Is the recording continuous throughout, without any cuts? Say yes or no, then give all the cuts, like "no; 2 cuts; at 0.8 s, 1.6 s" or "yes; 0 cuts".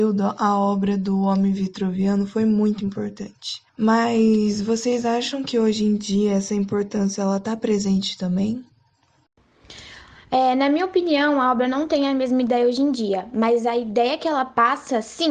no; 1 cut; at 3.7 s